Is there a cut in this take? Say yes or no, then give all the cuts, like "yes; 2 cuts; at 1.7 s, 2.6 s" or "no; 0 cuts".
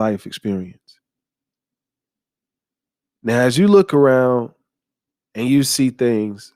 no; 0 cuts